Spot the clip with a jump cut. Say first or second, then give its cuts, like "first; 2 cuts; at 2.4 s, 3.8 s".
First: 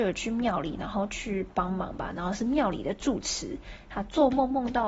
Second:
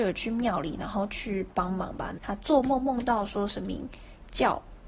second; 1 cut; at 2.2 s